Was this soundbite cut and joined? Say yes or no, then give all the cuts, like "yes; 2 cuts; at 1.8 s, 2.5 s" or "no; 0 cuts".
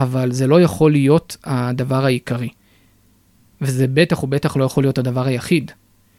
no; 0 cuts